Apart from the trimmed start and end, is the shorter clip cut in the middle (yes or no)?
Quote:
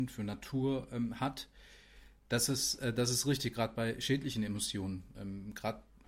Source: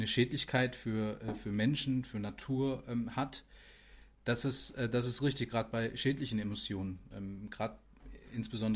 no